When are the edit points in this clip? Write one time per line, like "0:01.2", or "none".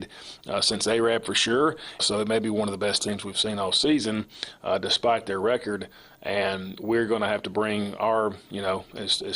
0:02.0